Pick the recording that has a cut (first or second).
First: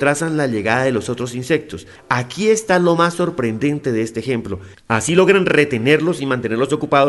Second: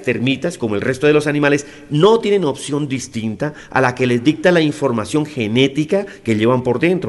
first